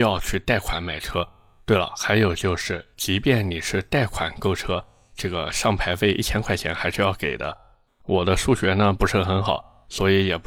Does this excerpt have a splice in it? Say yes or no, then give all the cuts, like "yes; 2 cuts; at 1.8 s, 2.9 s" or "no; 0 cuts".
yes; 1 cut; at 7.9 s